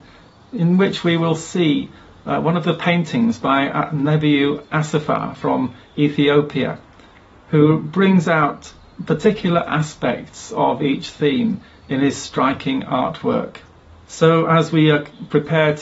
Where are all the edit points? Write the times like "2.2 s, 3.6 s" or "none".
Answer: 14.1 s